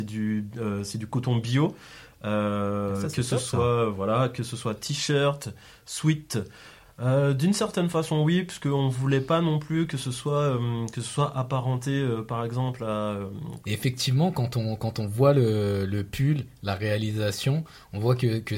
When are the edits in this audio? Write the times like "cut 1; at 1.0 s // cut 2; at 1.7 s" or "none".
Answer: cut 1; at 6.8 s // cut 2; at 13.6 s